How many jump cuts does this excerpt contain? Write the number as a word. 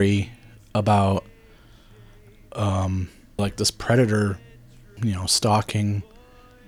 two